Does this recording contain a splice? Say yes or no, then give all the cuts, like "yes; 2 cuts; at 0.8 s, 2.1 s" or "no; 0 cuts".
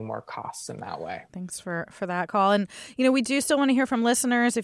yes; 1 cut; at 1.3 s